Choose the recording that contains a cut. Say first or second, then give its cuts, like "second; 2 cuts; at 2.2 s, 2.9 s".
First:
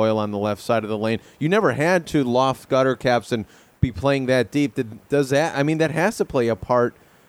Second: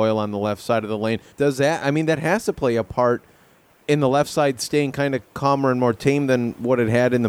second; 1 cut; at 1.3 s